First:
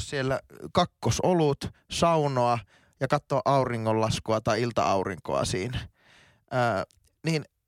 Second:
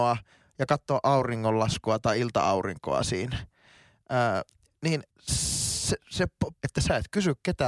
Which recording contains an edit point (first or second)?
second